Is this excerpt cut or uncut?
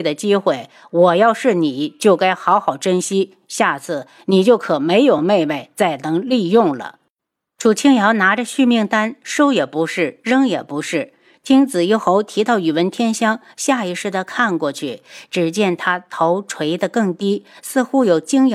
uncut